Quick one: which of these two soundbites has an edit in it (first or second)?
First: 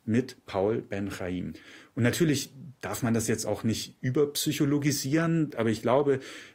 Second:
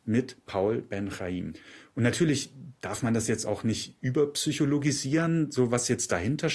first